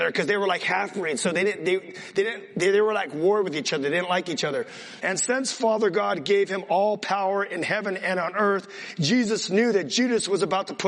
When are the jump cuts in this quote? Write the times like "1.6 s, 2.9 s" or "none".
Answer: 5.0 s